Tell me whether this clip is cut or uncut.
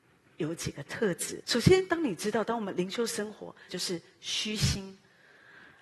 cut